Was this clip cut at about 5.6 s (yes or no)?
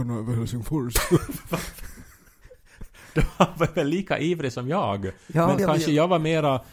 yes